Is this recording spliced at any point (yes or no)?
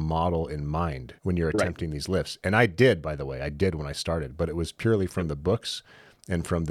yes